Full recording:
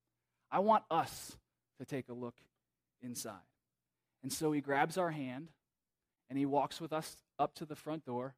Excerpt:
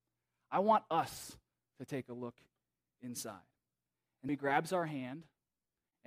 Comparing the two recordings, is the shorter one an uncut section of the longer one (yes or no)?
no